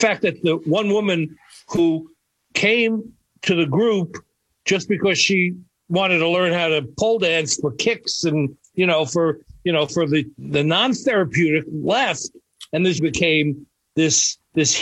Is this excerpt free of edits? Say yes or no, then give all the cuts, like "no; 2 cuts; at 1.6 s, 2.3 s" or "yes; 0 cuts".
no; 2 cuts; at 10.3 s, 13.0 s